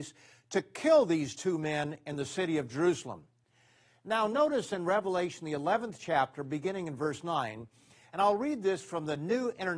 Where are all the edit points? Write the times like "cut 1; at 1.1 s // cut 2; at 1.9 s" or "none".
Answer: none